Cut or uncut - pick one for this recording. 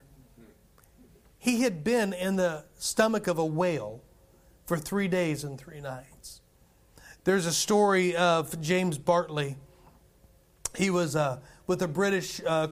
uncut